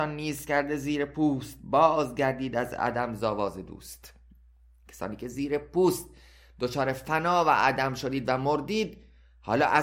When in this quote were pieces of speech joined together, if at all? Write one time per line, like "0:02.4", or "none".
none